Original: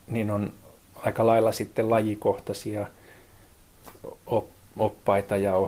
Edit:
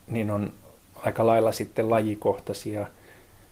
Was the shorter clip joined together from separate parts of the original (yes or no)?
no